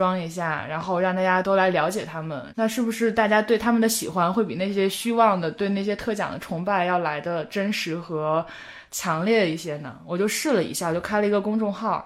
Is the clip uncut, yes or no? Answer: no